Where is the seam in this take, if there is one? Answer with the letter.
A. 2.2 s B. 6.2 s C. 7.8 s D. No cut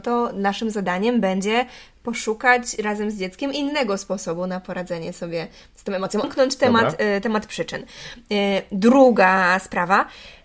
B